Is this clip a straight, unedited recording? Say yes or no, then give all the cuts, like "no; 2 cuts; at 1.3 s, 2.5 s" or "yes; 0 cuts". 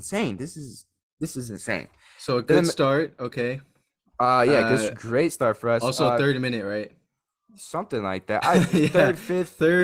yes; 0 cuts